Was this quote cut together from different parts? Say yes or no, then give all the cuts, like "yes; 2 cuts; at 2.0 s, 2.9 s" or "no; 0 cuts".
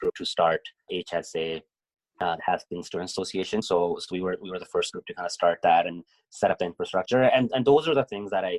no; 0 cuts